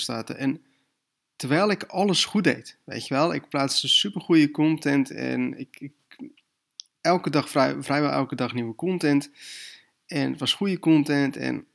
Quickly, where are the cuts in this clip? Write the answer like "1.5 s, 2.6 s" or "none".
none